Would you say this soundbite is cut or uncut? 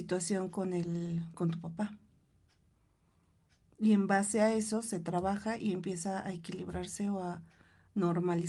uncut